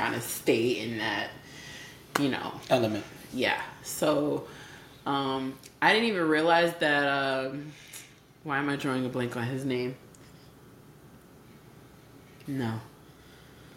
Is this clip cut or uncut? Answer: cut